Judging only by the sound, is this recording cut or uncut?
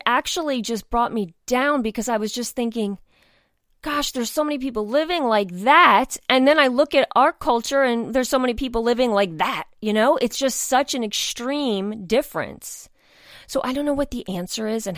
uncut